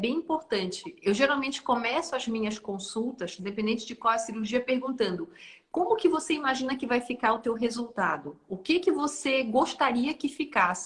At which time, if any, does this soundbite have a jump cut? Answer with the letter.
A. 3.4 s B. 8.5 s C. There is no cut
A